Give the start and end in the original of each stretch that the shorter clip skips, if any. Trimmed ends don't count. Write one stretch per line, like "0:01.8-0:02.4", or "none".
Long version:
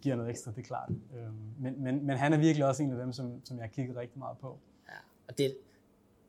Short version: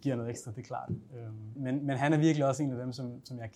0:01.6-0:01.8